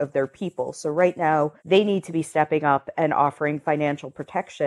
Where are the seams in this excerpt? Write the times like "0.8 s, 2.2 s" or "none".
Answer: 1.6 s